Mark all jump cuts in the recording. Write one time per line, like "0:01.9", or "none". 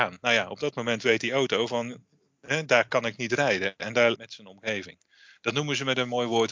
0:04.1